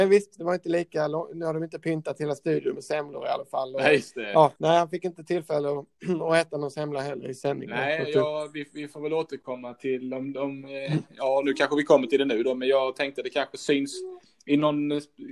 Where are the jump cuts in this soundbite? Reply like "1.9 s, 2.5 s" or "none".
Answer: 4.6 s